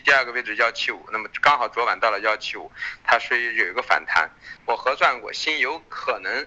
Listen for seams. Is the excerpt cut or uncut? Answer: cut